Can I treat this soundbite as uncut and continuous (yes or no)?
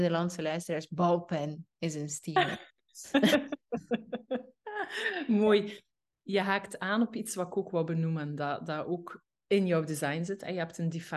yes